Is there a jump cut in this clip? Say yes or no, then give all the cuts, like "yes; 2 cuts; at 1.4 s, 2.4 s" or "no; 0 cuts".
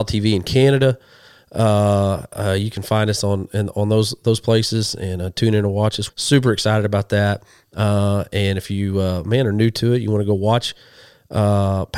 yes; 1 cut; at 6.1 s